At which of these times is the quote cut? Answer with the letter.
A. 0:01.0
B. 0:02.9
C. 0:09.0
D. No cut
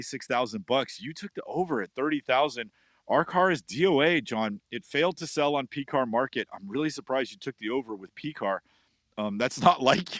D